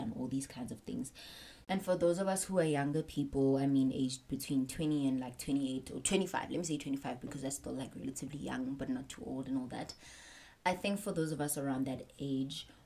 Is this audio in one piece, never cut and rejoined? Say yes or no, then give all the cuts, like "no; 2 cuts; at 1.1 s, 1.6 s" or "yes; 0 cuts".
no; 1 cut; at 1.6 s